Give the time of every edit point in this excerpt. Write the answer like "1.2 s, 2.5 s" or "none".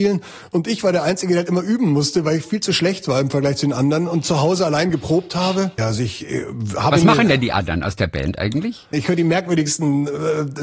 5.8 s, 8.9 s